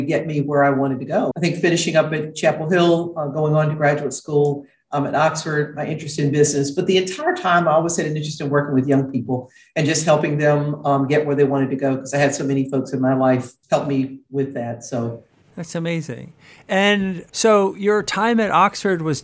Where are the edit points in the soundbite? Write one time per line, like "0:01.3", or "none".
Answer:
0:01.3